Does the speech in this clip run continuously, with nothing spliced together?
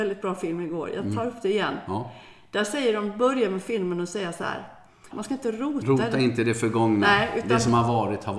no; 1 cut; at 5.1 s

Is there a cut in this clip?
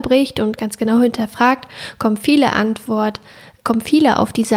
no; 0 cuts

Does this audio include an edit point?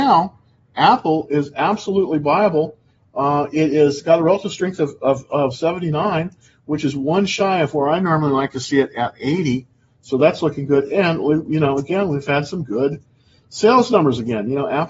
no; 0 cuts

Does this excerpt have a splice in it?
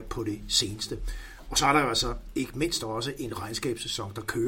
no; 0 cuts

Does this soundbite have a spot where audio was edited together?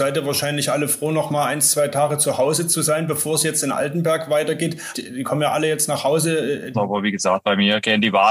yes; 2 cuts; at 4.9 s, 6.7 s

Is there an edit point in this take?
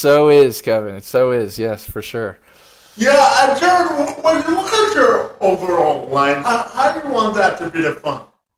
yes; 1 cut; at 6.4 s

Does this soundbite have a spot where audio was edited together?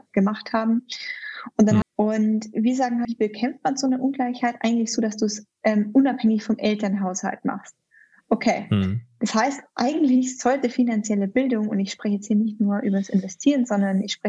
yes; 2 cuts; at 1.8 s, 3.0 s

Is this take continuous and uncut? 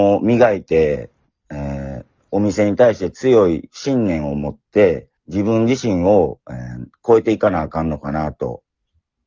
no; 1 cut; at 5.2 s

